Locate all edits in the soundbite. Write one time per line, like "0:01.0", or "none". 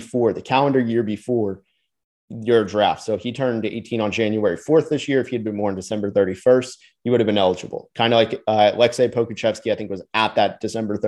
none